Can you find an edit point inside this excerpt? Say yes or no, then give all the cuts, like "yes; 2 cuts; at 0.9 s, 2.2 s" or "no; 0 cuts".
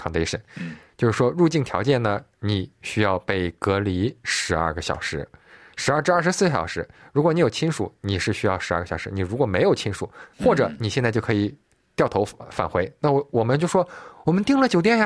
yes; 1 cut; at 10.3 s